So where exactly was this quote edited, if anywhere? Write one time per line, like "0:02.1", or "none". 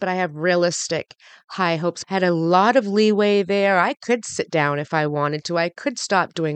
0:02.0